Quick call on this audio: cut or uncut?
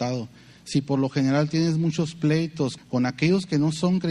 cut